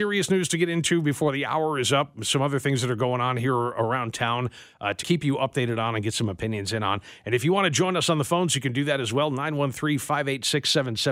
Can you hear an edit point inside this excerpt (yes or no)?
yes